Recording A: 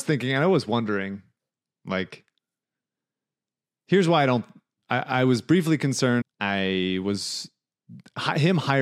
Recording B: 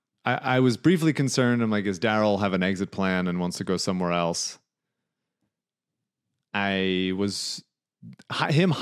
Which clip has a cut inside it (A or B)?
A